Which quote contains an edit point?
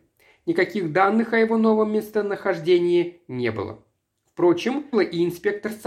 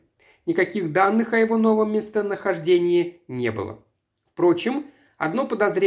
first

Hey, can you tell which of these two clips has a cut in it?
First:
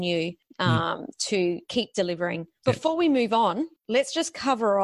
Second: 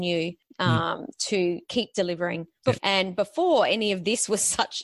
second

